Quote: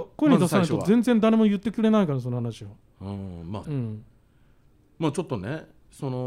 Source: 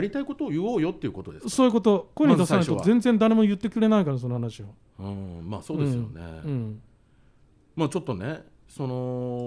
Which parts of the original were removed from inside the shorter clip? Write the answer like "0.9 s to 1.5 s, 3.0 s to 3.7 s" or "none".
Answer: 5.6 s to 6.4 s